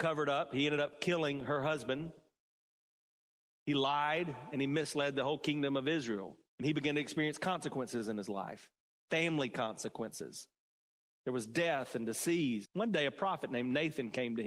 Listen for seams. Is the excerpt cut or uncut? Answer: cut